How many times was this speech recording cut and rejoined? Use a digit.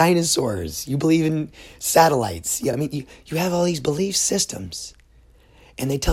0